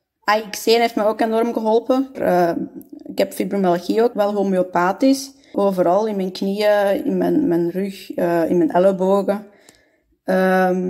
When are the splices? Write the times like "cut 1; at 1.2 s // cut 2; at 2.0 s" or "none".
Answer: cut 1; at 2.1 s // cut 2; at 4.1 s // cut 3; at 5.5 s